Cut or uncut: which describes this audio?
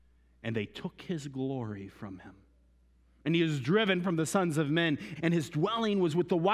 cut